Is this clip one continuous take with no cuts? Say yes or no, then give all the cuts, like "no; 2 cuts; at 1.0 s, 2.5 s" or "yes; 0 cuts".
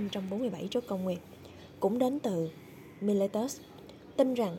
yes; 0 cuts